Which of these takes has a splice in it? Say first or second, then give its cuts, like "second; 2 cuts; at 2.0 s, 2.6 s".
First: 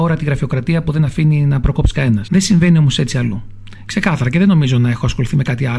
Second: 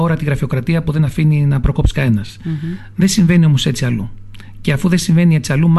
first; 2 cuts; at 2.3 s, 3.9 s